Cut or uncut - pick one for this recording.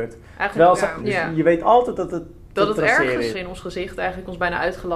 cut